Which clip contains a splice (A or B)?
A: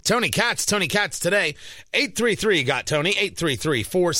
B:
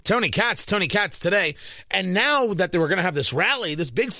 B